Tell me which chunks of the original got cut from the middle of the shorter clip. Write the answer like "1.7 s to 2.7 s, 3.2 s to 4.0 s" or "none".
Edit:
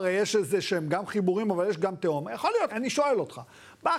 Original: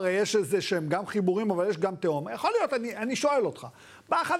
2.7 s to 3.0 s